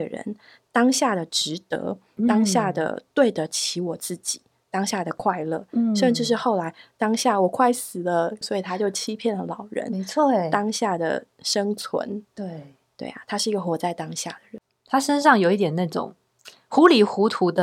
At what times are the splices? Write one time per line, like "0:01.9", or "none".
0:08.4